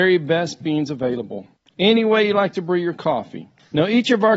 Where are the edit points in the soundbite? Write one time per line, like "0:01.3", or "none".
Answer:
0:01.7